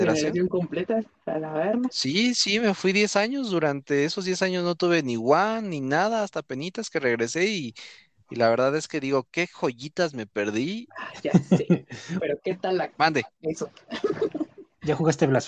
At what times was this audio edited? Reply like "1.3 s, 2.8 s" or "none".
12.2 s